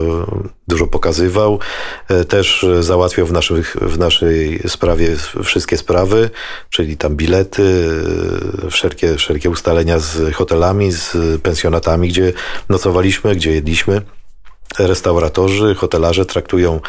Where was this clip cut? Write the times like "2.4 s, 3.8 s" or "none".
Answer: 14.7 s